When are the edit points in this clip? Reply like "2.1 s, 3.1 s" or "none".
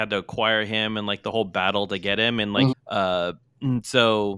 2.7 s